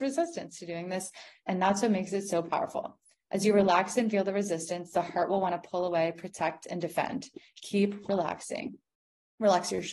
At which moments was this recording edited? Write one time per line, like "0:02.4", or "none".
none